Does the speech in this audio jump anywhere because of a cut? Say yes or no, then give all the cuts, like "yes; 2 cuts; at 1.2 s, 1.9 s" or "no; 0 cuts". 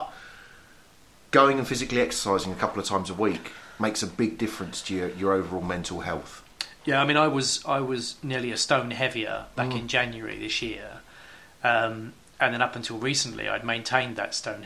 no; 0 cuts